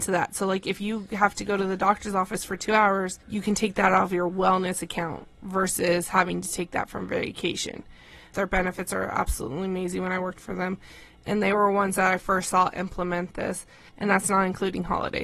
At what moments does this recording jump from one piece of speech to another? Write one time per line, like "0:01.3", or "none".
0:03.2
0:08.3
0:13.9

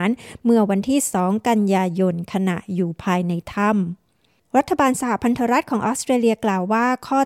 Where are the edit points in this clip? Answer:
none

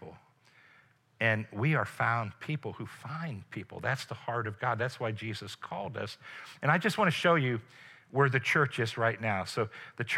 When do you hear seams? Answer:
none

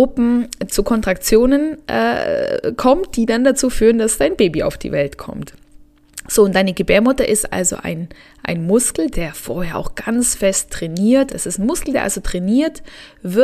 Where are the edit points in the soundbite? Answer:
0:09.1
0:11.3

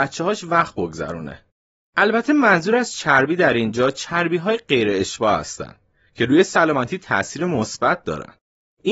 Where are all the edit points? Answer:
0:01.8

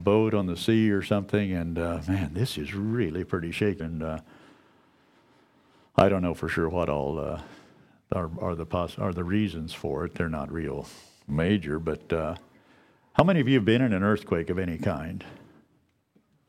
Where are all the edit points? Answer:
0:03.8

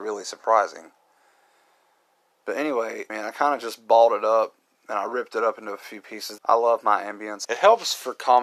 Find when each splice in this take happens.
0:03.1
0:06.4
0:07.4

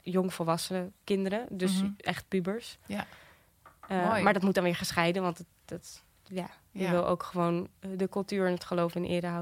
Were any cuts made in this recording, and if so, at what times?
none

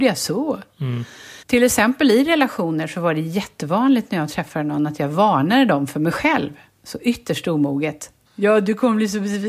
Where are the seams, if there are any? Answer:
0:01.4
0:08.3

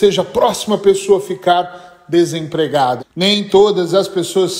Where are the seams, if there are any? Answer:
0:03.0

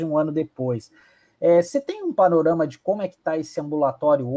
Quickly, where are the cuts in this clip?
none

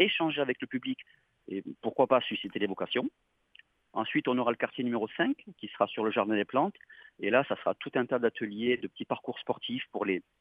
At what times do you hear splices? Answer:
none

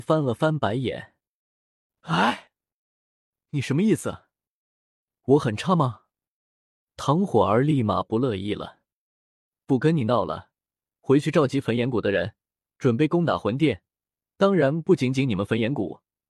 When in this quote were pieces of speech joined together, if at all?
none

